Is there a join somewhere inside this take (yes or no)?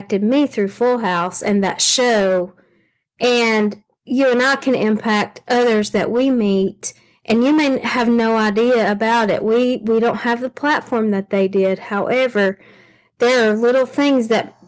no